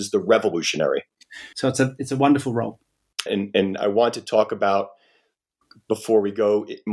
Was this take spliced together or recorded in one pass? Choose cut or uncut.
cut